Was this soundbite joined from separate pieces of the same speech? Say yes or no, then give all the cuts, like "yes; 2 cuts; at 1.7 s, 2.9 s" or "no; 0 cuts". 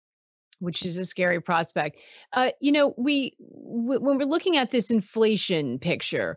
no; 0 cuts